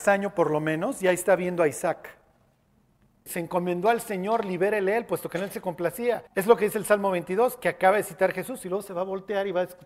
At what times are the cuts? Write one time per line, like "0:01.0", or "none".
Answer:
0:03.3
0:06.3